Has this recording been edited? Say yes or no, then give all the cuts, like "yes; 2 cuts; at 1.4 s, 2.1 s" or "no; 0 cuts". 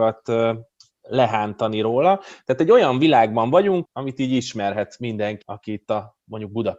yes; 2 cuts; at 3.8 s, 5.4 s